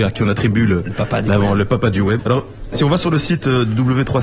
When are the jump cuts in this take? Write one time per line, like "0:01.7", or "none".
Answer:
0:02.2